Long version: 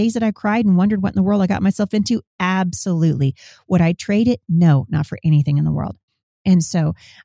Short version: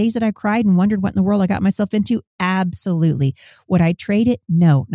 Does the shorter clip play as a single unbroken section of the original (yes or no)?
yes